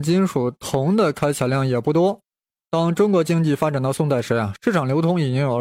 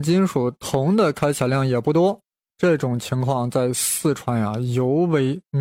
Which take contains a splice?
first; 1 cut; at 2.6 s

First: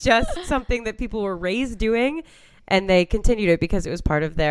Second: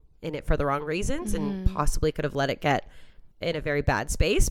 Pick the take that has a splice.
second; 1 cut; at 3.3 s

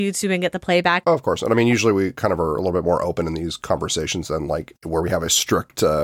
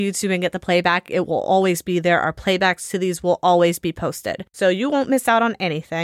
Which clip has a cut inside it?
first; 1 cut; at 1.0 s

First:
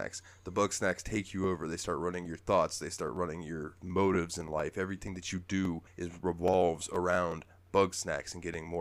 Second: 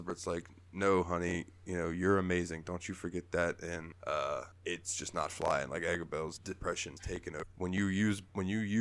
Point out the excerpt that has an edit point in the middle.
second; 1 cut; at 7.5 s

